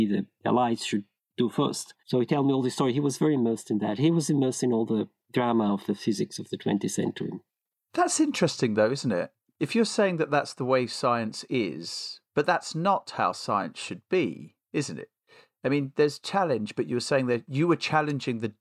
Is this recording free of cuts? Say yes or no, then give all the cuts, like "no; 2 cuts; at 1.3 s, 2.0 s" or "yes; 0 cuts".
no; 1 cut; at 7.7 s